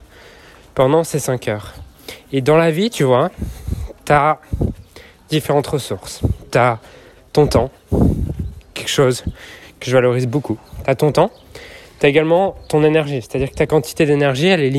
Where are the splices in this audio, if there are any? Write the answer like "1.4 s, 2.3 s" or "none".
none